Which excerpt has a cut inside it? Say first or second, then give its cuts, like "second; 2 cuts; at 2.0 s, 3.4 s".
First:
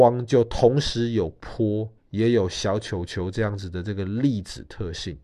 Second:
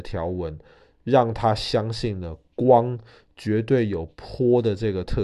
first; 1 cut; at 2.0 s